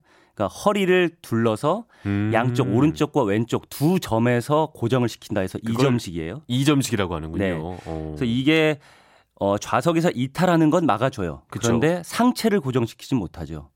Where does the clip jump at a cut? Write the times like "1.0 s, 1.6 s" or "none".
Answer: none